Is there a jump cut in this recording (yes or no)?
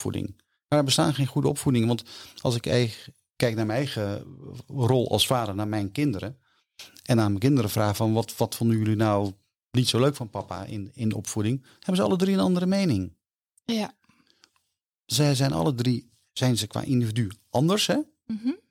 no